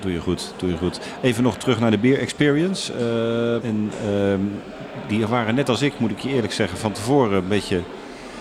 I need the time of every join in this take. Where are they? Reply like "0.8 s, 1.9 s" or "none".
3.6 s

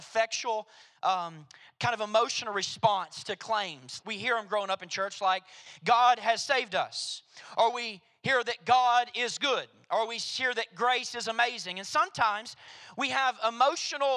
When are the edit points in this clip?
4.0 s

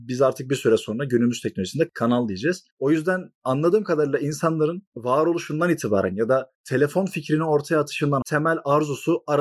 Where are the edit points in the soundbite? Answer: 8.2 s

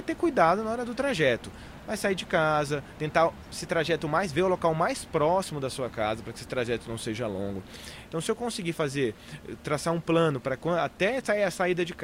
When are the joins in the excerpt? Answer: 8.1 s

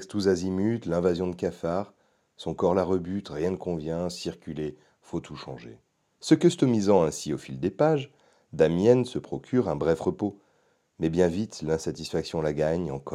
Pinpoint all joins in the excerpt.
6.1 s

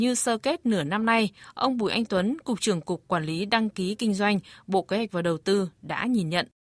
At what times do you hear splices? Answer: none

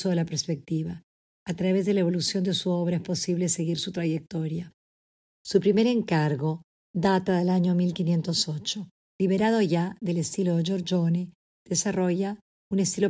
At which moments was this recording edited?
1.3 s, 9.1 s

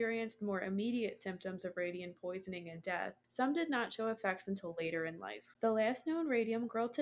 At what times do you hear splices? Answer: none

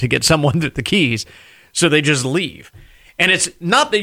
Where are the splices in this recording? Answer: none

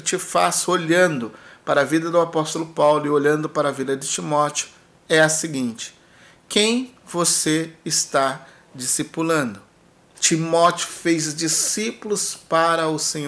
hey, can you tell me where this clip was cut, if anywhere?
10.1 s

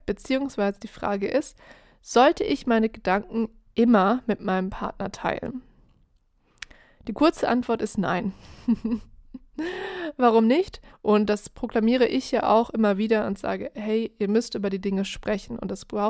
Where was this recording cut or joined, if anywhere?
10.9 s

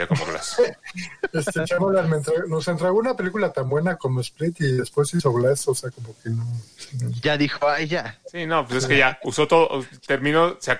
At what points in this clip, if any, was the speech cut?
none

